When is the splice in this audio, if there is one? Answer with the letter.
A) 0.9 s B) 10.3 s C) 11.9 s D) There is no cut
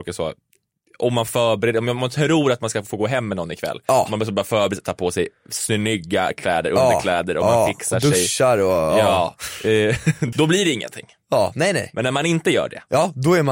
B